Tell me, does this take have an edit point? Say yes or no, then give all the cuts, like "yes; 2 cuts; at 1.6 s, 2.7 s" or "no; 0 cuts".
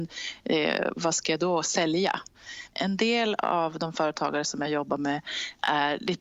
yes; 1 cut; at 2.7 s